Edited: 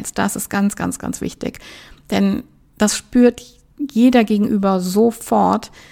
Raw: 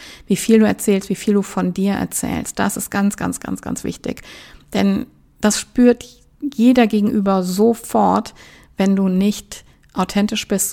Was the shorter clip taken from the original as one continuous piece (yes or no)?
no